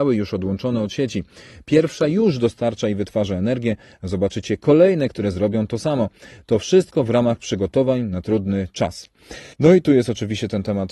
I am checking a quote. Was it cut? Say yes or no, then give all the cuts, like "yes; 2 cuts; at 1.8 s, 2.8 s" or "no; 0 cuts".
yes; 1 cut; at 9.5 s